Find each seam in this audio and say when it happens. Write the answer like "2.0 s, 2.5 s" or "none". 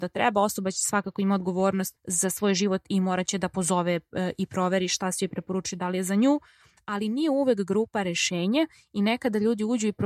2.0 s